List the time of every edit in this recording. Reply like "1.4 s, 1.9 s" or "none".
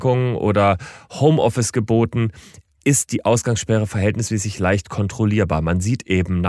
none